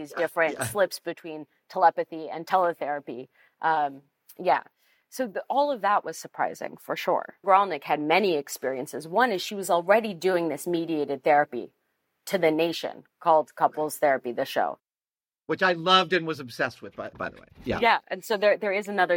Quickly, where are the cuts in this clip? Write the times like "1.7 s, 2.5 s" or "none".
7.4 s, 17.1 s